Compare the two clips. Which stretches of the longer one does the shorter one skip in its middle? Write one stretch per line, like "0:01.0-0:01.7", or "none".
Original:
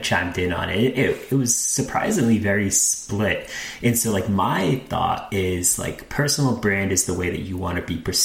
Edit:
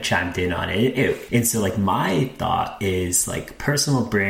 0:01.3-0:03.8

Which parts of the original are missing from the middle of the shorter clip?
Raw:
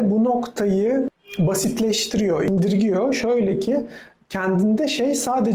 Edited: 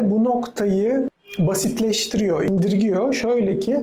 none

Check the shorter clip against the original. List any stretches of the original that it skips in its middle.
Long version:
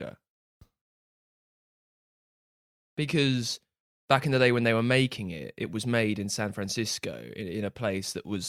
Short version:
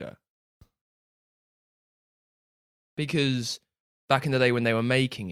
none

